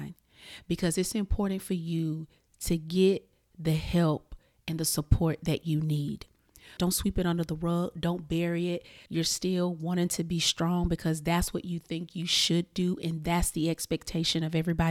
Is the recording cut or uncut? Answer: cut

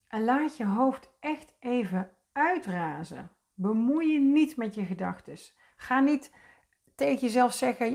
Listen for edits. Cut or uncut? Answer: uncut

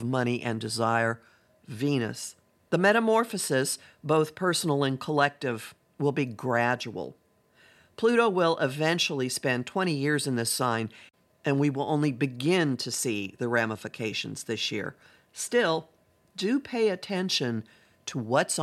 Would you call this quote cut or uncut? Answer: cut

